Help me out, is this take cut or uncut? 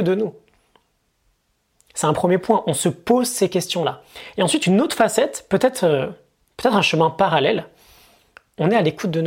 uncut